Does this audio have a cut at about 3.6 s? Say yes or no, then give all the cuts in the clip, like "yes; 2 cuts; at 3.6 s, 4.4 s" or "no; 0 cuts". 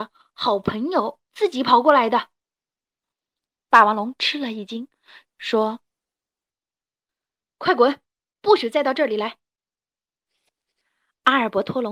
no; 1 cut; at 5.3 s